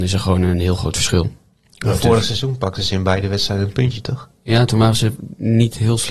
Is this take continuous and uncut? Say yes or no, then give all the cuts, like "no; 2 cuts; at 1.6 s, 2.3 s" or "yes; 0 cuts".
yes; 0 cuts